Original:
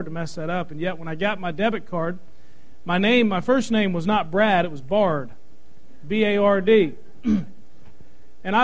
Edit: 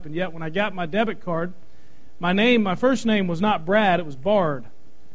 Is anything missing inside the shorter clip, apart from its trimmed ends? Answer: no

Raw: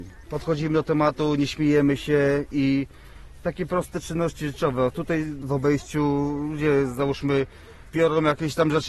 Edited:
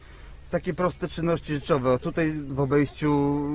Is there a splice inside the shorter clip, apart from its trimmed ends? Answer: no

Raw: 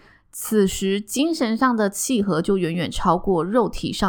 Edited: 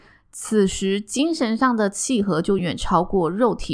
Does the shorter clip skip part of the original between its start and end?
yes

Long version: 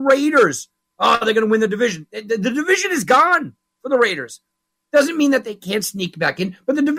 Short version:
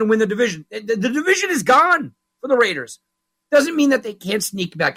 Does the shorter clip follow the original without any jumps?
yes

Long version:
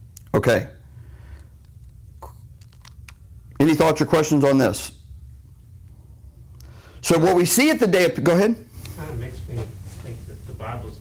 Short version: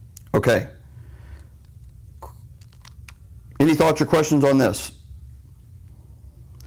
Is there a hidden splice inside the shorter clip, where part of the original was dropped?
no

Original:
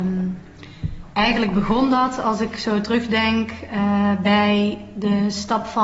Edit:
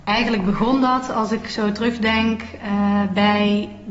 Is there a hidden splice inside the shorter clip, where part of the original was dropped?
no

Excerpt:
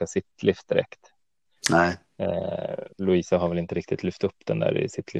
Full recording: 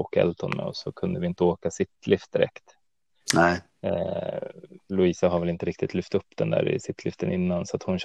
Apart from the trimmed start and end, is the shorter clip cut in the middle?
yes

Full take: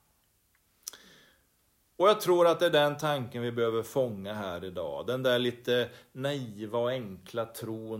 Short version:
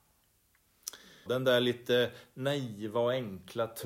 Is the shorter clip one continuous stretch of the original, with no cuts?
no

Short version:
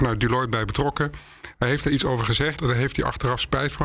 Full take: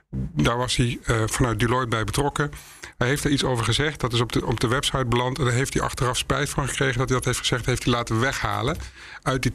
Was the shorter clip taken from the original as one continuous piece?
no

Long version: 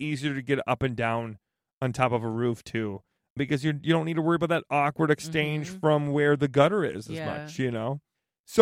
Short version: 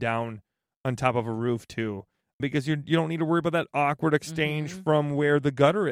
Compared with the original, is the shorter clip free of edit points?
yes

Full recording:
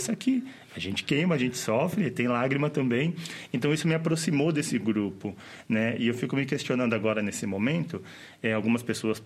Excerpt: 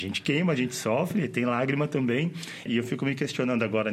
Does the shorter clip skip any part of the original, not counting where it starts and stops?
yes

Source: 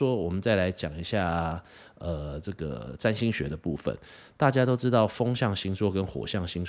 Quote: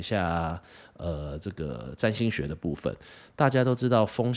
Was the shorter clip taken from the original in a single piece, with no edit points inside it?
yes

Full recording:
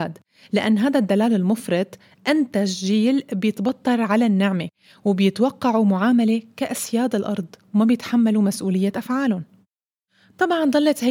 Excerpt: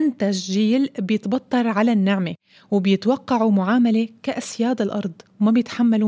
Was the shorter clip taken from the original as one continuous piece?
yes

